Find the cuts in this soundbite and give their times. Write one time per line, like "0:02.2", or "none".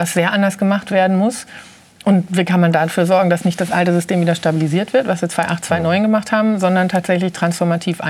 none